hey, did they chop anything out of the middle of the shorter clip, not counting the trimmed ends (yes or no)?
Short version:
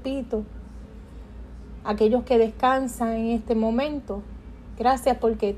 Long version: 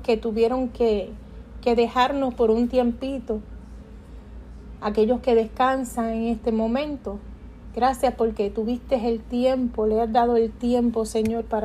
no